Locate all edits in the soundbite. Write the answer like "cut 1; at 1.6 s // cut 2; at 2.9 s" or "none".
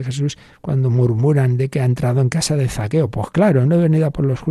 none